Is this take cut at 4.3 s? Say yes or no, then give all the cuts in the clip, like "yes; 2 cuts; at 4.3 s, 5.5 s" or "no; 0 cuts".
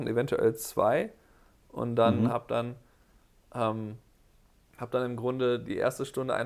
no; 1 cut; at 2.3 s